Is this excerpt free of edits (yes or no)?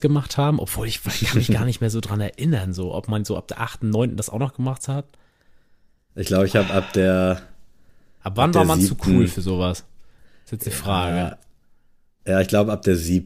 yes